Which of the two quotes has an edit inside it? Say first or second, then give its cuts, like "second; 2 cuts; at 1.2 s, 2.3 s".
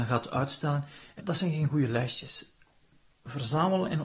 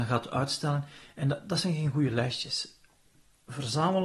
first; 1 cut; at 1.2 s